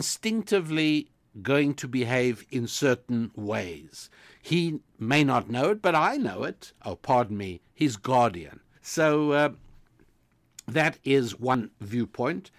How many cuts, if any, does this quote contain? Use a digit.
2